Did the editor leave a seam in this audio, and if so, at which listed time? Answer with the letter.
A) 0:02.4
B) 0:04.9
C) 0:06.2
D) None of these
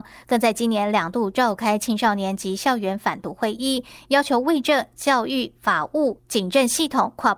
D